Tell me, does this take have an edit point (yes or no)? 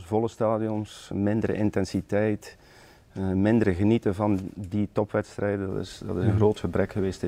yes